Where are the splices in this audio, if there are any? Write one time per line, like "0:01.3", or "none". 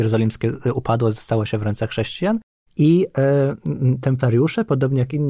0:02.7